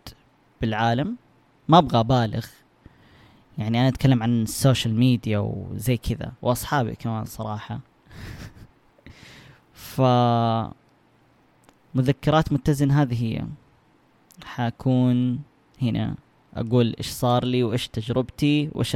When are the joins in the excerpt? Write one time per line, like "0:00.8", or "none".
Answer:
0:06.4